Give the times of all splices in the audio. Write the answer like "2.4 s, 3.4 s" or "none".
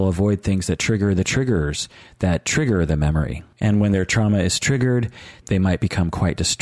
3.5 s, 5.4 s

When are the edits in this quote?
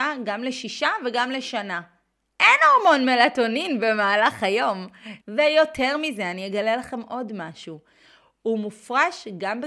5.2 s

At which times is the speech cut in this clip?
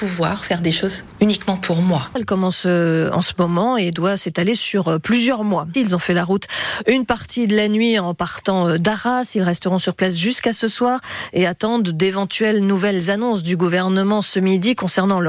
2.2 s, 5.7 s

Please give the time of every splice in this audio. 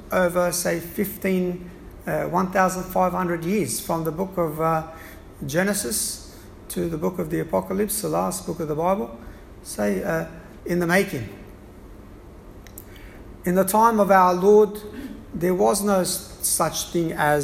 10.6 s

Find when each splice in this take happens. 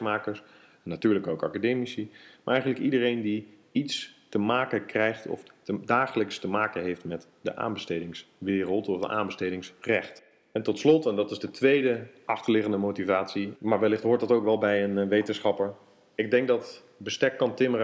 13.6 s

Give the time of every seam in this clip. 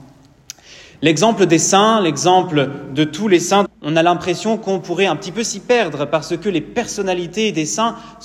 3.7 s

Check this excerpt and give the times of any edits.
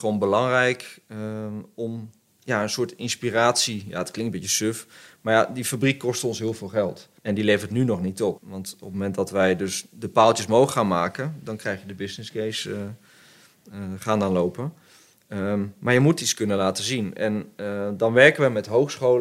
7.2 s, 8.4 s

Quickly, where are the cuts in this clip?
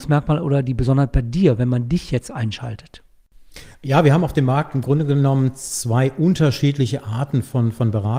none

